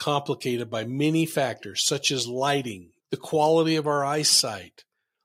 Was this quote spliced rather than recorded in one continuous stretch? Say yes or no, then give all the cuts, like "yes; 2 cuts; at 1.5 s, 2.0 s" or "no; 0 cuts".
yes; 1 cut; at 3.0 s